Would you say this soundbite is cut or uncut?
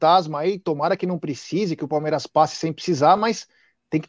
uncut